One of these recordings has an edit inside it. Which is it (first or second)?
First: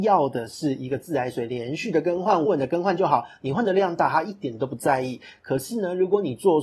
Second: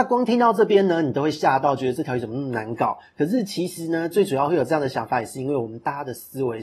first